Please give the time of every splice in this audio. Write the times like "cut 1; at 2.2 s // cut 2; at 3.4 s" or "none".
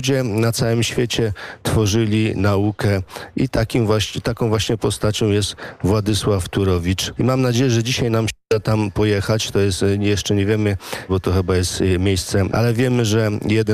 cut 1; at 7.1 s // cut 2; at 11.1 s // cut 3; at 12.5 s